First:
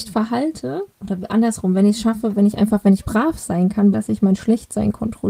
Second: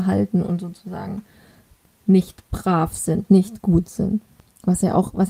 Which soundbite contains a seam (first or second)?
first